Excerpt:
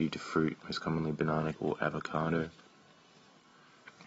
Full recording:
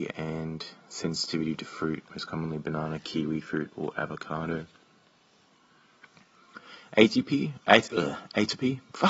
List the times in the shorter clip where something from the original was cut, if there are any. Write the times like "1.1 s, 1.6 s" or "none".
1.5 s